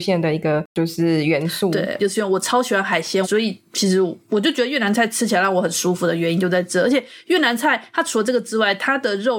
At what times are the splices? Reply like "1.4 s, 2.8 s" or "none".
2.0 s, 3.2 s